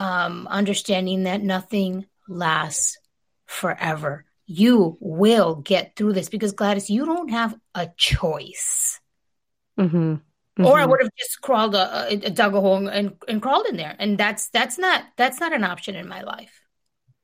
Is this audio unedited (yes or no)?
yes